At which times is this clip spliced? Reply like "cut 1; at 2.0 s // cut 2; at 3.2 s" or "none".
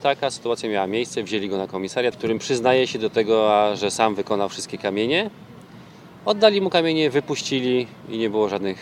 cut 1; at 2.1 s